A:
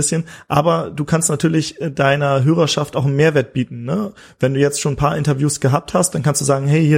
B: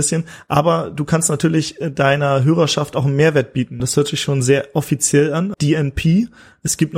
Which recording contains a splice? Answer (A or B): B